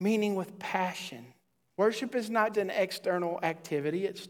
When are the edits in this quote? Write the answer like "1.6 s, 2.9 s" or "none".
2.5 s